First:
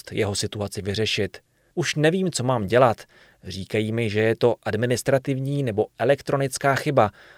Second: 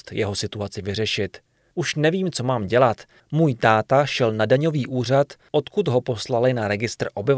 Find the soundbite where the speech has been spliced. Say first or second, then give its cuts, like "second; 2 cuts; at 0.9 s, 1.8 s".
second; 1 cut; at 3.2 s